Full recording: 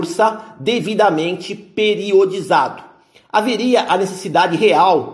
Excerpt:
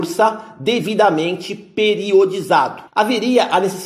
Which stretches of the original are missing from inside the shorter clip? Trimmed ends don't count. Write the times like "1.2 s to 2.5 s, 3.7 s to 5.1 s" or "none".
2.9 s to 3.2 s